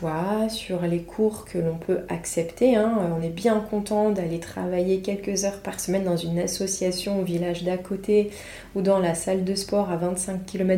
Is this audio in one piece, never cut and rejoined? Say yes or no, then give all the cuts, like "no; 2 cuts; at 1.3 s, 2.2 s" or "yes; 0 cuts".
yes; 0 cuts